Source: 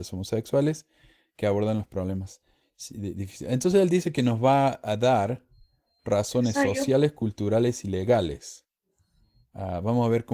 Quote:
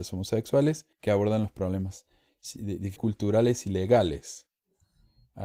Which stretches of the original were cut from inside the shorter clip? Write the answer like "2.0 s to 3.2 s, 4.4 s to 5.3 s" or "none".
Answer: 0.9 s to 1.3 s, 3.3 s to 7.1 s

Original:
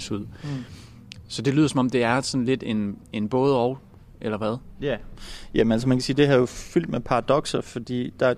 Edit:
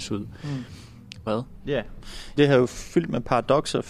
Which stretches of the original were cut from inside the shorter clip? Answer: 1.3 s to 4.4 s, 5.5 s to 6.2 s

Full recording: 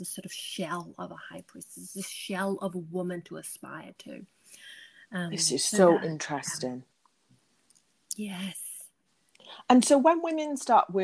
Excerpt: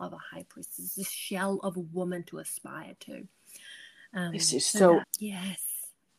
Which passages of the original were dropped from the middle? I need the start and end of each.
6.0 s to 8.0 s

